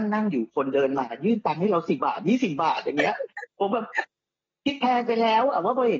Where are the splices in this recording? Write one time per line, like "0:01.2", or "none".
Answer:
0:02.0